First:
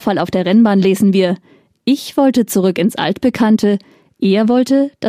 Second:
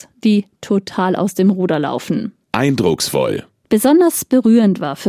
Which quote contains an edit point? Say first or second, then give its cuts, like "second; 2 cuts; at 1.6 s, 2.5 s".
second; 1 cut; at 2.4 s